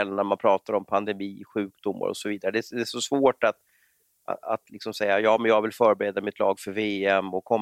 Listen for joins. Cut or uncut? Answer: uncut